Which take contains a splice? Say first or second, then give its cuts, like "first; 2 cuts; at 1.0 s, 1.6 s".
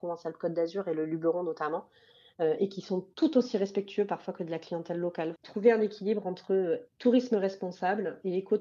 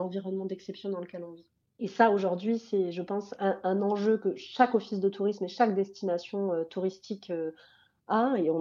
first; 2 cuts; at 5.4 s, 6.9 s